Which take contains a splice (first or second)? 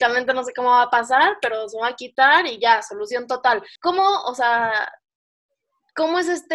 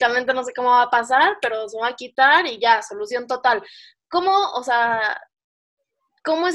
first